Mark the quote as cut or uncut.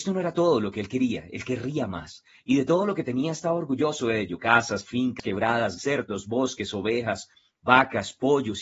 cut